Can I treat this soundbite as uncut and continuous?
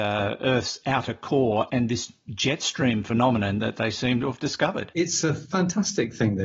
no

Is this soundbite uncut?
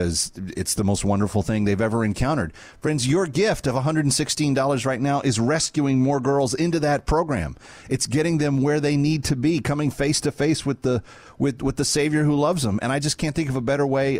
yes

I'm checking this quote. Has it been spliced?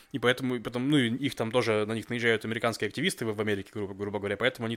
no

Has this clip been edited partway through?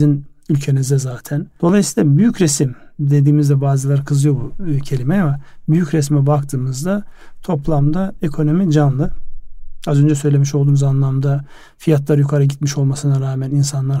yes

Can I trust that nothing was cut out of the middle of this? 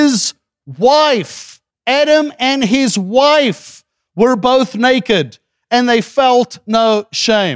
no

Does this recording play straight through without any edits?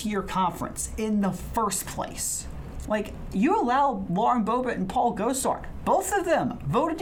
no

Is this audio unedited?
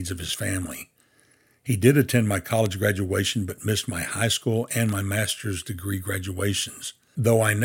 yes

